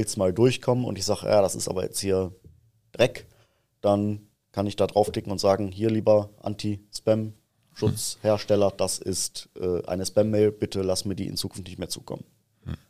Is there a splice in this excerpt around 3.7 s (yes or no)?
no